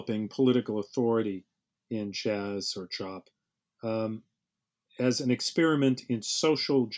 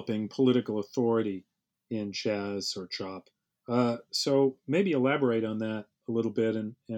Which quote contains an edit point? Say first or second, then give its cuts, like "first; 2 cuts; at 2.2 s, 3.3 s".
second; 1 cut; at 3.5 s